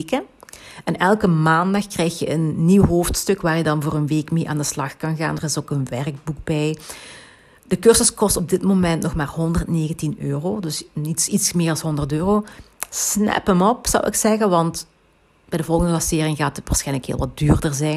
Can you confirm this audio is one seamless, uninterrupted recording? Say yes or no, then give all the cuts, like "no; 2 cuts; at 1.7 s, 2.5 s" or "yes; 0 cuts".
yes; 0 cuts